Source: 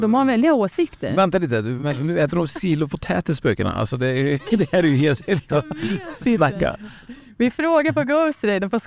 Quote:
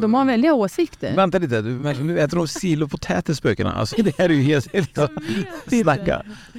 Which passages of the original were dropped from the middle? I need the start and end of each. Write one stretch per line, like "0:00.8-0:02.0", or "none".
0:03.9-0:04.4